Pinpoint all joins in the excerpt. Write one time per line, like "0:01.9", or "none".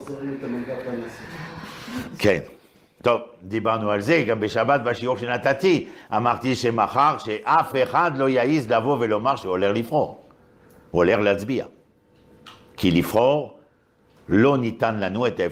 none